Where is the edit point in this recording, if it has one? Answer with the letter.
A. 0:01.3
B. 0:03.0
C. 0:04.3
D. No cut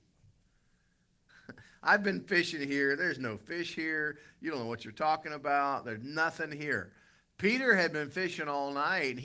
A